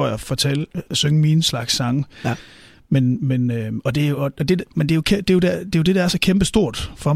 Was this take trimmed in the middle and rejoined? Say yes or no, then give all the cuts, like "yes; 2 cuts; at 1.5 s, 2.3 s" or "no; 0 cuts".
no; 0 cuts